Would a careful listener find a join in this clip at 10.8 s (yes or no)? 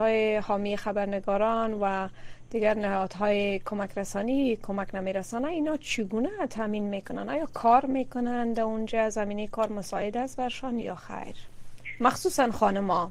yes